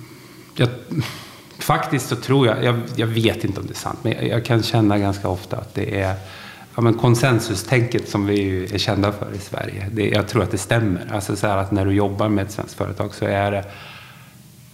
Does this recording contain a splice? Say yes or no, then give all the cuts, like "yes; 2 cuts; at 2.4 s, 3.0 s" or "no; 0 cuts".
no; 0 cuts